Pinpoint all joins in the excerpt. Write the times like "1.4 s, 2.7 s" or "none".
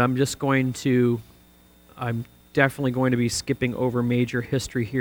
none

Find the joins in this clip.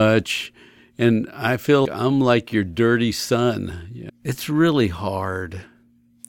1.8 s, 4.1 s

